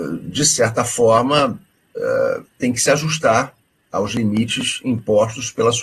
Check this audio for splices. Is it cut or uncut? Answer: uncut